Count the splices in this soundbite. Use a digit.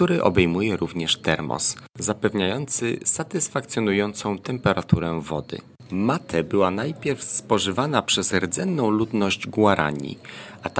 0